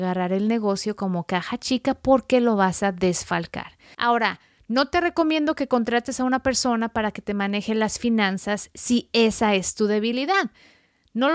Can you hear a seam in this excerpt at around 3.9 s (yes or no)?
yes